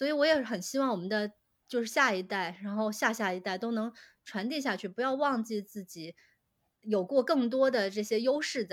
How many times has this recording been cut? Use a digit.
0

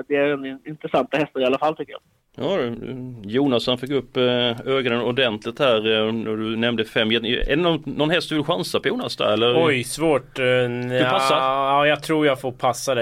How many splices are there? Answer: 0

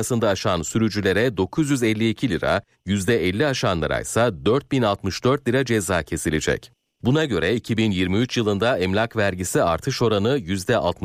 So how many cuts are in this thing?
2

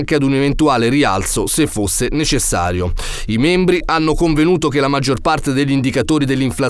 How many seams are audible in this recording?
1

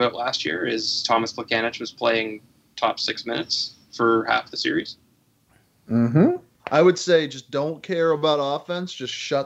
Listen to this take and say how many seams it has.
1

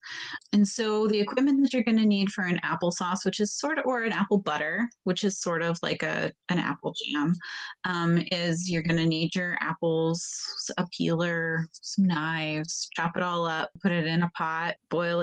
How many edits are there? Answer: 0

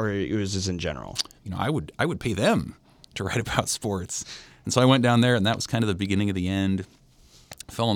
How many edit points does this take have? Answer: 1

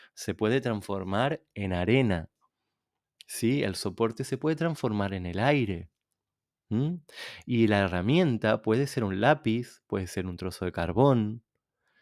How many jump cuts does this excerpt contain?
0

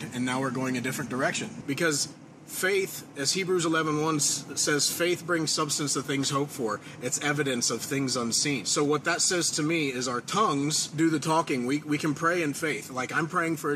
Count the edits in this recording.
1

